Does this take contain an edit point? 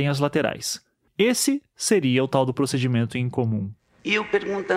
yes; 1 cut; at 1.1 s

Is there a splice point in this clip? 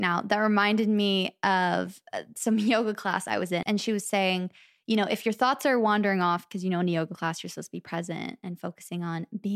yes; 1 cut; at 3.6 s

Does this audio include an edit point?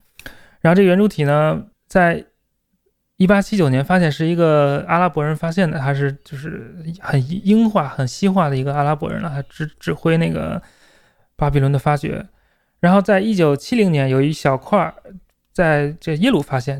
yes; 1 cut; at 1.7 s

